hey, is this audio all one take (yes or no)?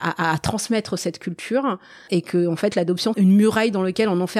no